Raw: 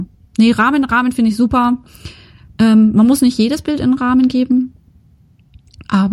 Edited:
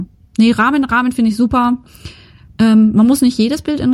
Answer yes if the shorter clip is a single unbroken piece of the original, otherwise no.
yes